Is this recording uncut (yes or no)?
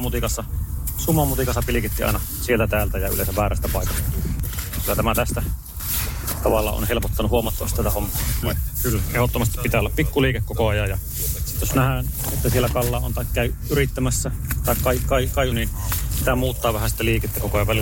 no